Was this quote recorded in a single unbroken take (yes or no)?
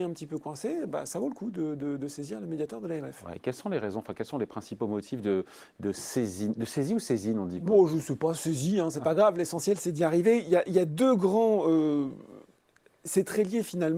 yes